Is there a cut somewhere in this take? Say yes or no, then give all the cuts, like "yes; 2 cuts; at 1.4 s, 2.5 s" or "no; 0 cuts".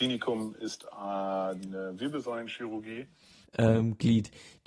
yes; 1 cut; at 3.4 s